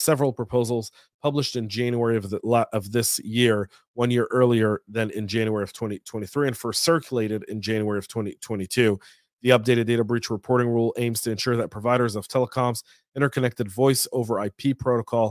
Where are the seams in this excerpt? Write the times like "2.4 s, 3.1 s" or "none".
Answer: none